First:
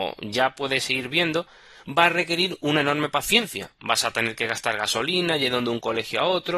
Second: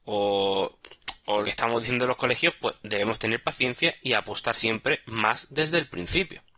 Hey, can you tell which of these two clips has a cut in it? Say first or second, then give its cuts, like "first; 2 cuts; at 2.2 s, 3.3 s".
second; 1 cut; at 1.4 s